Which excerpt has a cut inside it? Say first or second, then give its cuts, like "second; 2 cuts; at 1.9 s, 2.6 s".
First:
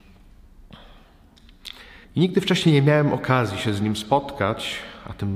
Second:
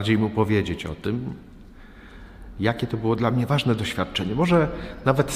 first; 1 cut; at 2.0 s